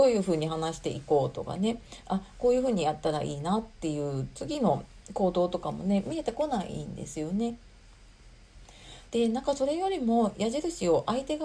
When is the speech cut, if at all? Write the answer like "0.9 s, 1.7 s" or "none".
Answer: 9.0 s

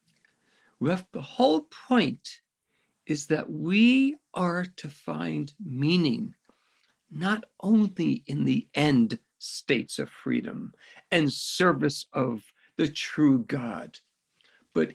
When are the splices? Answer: 1.1 s

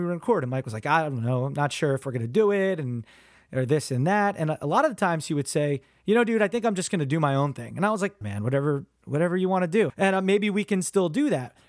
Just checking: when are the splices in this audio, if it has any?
8.2 s, 9.9 s

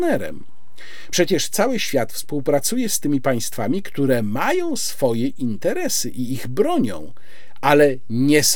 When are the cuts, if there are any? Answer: 1.1 s

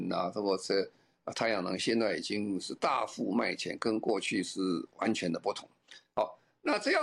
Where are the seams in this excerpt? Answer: none

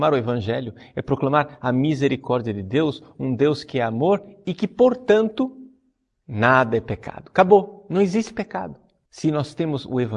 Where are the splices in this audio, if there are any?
9.1 s

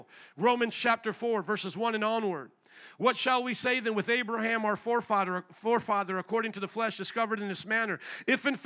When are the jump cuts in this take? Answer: none

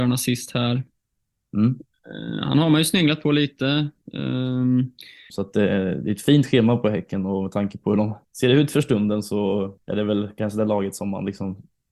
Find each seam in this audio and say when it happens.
5.3 s, 8.2 s, 9.8 s

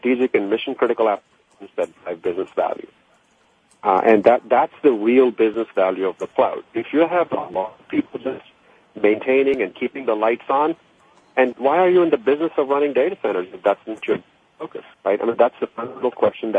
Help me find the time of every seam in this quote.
11.5 s, 14.9 s

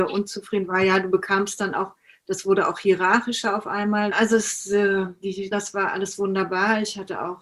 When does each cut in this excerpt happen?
4.1 s, 5.5 s

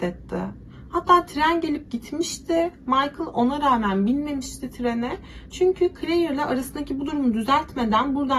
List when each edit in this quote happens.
none

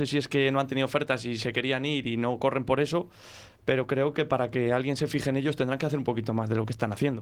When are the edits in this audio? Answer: none

